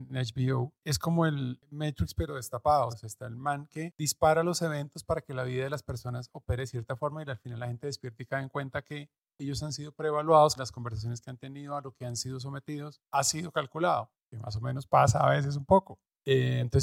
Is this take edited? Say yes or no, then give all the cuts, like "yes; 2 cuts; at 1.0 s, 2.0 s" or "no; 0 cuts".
yes; 2 cuts; at 2.9 s, 10.6 s